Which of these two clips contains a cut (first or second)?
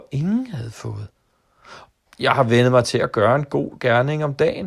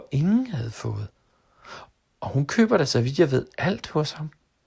first